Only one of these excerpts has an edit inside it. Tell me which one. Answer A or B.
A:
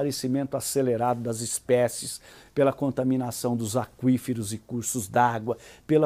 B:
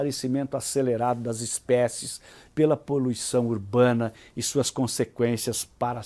B